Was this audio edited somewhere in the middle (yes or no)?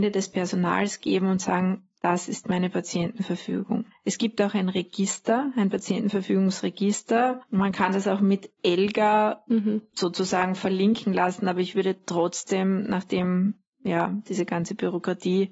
no